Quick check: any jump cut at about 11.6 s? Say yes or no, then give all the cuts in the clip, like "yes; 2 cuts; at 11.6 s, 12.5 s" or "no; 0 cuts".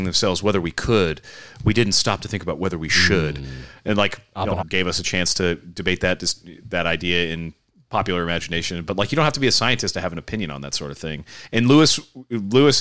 no; 1 cut; at 4.6 s